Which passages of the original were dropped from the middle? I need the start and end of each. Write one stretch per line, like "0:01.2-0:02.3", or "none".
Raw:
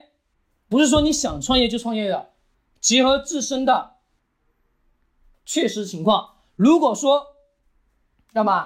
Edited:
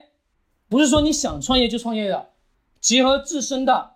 none